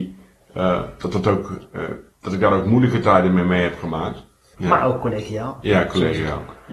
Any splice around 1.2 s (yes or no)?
no